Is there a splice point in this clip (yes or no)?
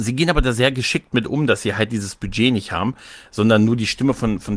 no